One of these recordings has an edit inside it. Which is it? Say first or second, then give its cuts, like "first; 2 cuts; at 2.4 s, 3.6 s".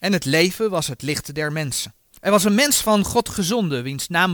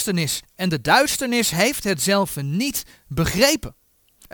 first; 1 cut; at 2.1 s